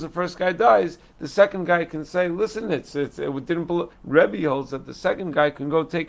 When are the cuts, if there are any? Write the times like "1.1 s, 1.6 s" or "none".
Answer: 3.9 s

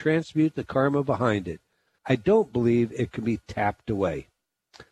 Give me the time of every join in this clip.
2.0 s

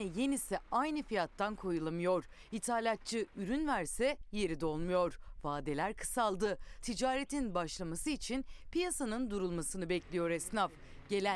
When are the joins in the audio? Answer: 6.8 s

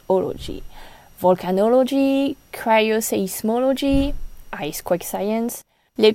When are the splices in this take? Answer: none

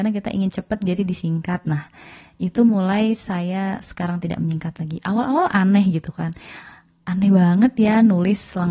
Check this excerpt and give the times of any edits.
none

